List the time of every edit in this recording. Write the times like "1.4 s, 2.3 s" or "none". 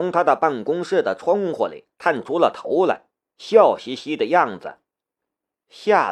5.2 s